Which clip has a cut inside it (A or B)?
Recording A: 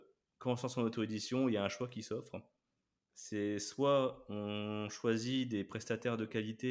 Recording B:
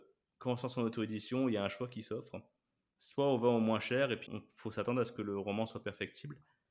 B